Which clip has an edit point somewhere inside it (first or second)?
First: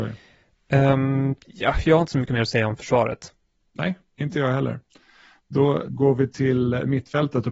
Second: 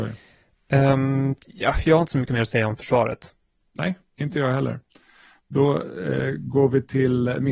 first